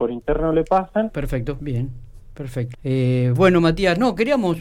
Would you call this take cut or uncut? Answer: cut